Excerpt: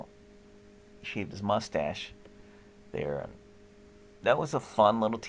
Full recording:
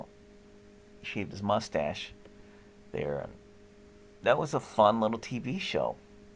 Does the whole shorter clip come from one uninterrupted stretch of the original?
yes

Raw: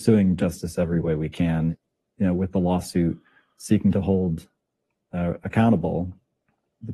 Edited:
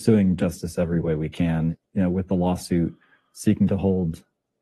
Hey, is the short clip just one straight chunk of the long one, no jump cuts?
no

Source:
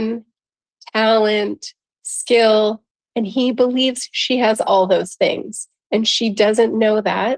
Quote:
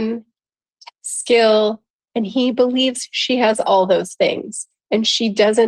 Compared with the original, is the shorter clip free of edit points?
no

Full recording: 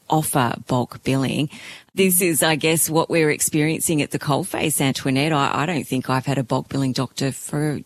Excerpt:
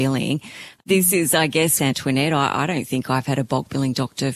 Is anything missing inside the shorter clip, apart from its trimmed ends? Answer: yes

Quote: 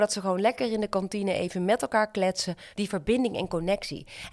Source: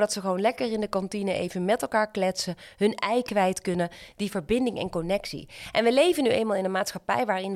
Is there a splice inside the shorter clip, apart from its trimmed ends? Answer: yes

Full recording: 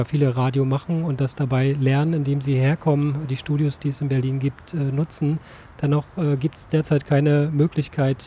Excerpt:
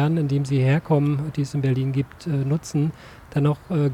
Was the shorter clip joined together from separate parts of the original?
yes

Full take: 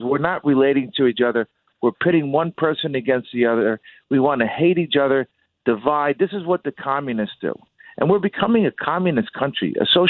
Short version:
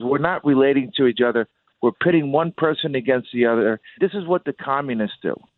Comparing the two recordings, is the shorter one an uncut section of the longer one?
no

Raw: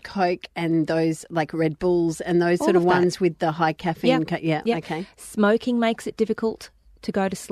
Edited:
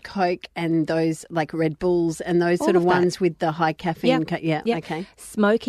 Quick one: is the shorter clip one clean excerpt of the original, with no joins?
yes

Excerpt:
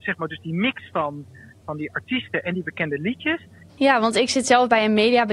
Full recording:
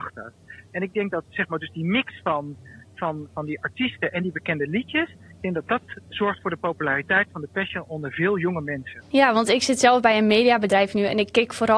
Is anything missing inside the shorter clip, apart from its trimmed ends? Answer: yes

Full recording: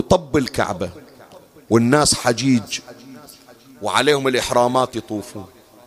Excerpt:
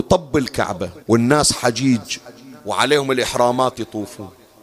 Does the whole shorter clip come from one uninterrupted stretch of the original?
no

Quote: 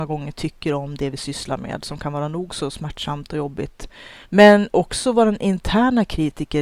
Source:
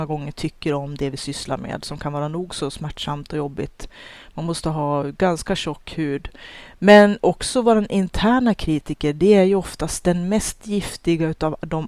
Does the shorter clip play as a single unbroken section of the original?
no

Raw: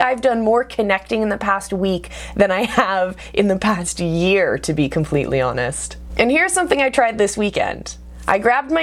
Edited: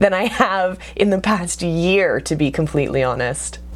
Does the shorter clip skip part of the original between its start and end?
no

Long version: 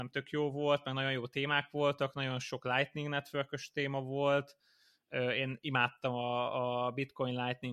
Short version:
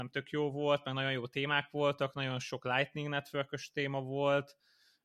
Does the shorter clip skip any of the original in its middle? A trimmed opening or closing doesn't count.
no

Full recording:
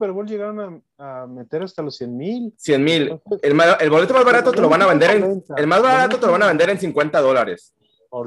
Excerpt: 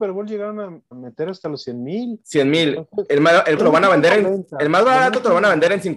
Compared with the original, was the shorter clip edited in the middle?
yes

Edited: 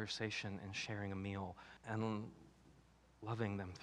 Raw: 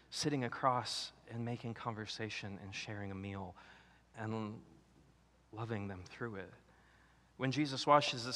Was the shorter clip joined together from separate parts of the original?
yes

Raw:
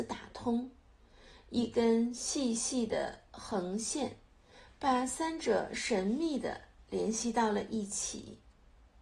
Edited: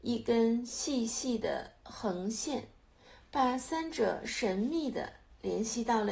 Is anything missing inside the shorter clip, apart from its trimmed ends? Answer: no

